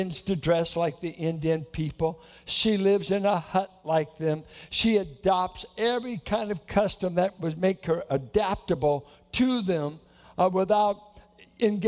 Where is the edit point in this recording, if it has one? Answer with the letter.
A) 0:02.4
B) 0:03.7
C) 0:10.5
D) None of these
D